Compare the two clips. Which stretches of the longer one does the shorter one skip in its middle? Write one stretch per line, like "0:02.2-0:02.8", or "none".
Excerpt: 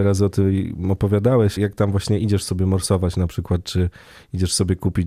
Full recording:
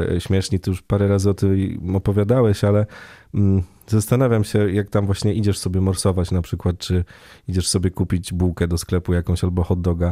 0:02.6-0:04.7